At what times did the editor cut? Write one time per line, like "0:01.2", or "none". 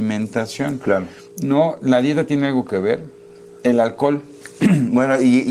none